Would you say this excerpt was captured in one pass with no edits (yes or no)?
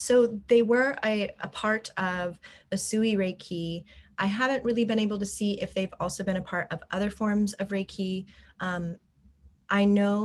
yes